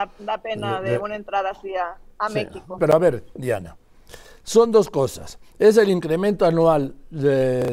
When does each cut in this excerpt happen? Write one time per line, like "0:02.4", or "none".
0:02.8